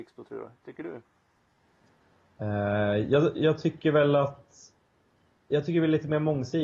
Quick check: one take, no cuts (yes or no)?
yes